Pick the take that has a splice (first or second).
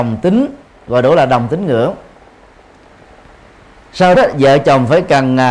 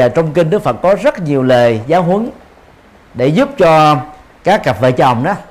first